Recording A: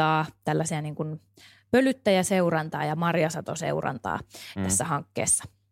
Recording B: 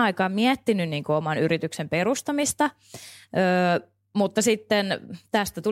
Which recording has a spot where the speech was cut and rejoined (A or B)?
A